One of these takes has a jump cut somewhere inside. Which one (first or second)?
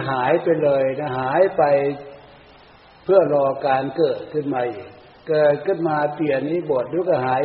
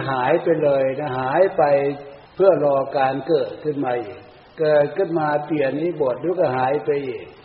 second